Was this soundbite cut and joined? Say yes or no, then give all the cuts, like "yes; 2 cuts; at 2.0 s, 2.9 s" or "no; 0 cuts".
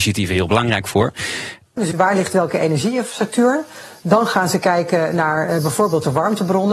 yes; 1 cut; at 1.8 s